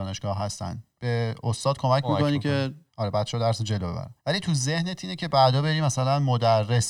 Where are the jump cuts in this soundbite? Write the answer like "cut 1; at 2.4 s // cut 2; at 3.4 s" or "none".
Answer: cut 1; at 2.9 s // cut 2; at 4.2 s